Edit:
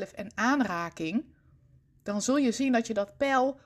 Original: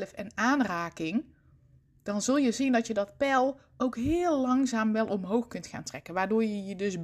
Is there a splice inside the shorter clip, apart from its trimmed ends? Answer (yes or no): no